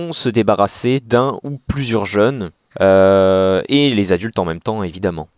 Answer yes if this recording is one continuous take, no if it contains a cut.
no